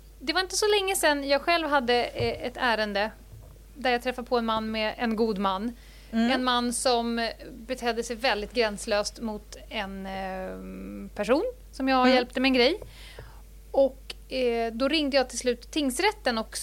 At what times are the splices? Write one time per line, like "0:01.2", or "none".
none